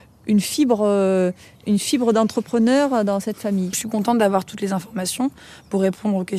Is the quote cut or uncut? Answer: cut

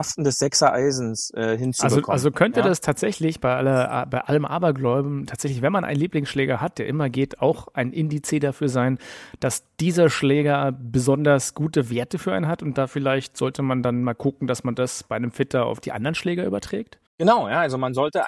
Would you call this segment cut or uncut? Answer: cut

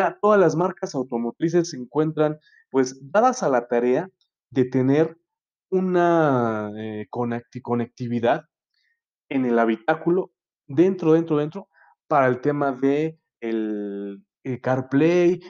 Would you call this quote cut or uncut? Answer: uncut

